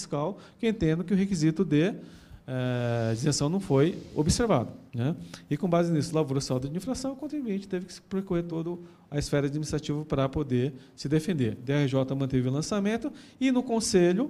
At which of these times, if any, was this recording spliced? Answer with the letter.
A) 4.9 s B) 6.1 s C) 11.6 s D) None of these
A